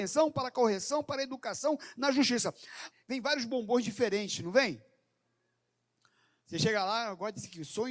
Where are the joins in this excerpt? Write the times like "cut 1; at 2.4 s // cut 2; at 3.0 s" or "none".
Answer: cut 1; at 2.9 s // cut 2; at 6.4 s